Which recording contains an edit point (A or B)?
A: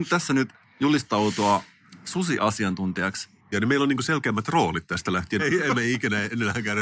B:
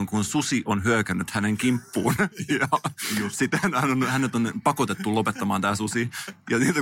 A